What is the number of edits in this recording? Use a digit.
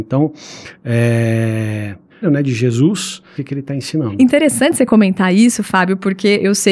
2